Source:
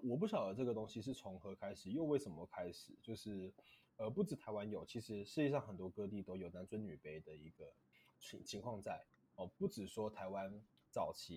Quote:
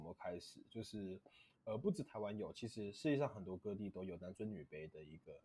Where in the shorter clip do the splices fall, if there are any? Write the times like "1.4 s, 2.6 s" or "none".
none